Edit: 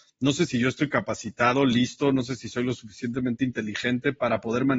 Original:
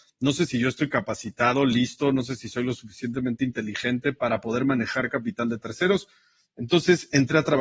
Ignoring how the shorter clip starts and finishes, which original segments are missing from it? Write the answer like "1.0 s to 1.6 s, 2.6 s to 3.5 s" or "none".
none